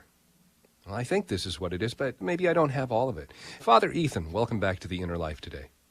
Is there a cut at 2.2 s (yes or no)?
yes